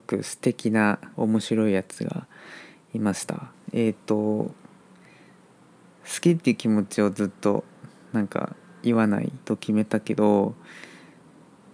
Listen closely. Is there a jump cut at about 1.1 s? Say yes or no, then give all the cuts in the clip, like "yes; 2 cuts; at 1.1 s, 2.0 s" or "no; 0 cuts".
yes; 2 cuts; at 1.1 s, 9.4 s